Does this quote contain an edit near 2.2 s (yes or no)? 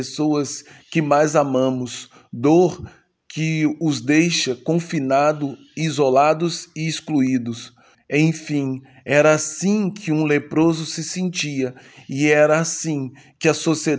no